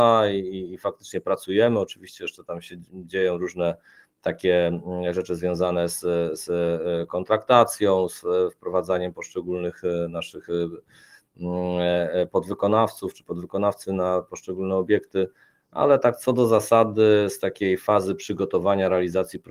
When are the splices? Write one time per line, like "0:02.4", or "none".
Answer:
none